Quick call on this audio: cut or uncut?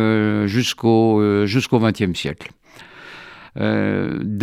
cut